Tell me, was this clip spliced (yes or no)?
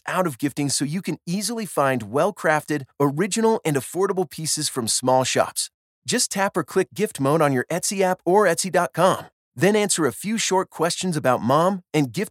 no